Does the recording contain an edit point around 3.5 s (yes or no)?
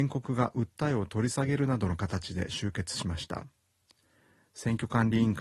no